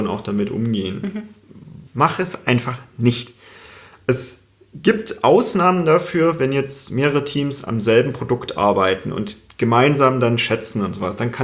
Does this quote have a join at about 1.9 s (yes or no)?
yes